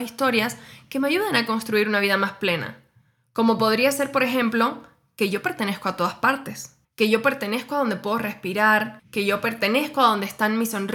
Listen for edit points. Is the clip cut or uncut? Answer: cut